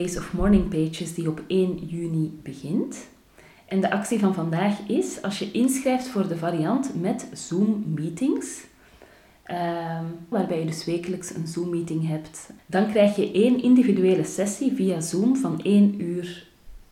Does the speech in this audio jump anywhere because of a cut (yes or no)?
yes